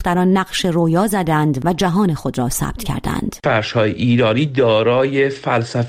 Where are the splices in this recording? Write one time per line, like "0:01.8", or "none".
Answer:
none